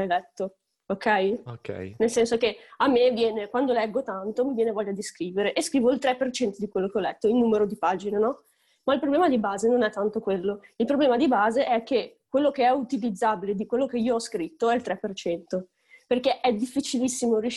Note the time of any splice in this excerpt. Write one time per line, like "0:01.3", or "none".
none